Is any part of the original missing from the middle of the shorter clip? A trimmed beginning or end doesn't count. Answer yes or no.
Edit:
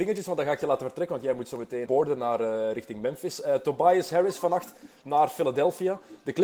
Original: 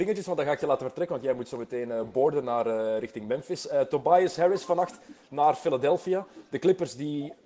yes